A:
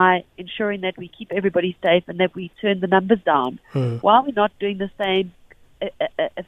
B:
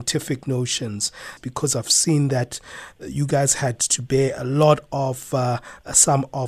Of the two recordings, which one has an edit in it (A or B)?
B